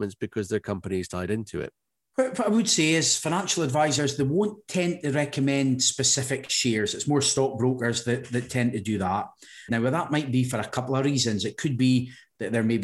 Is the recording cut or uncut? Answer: cut